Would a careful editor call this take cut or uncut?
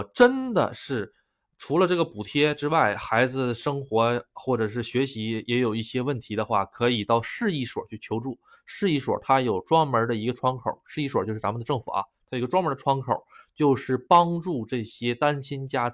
uncut